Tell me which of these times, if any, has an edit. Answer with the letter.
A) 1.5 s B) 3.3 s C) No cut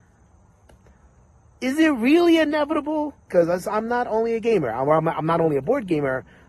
B